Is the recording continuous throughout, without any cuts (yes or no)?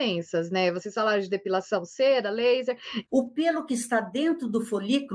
no